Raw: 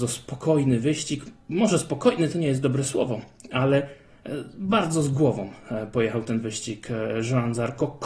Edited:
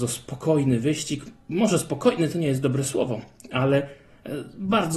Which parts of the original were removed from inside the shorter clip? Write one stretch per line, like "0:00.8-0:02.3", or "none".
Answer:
none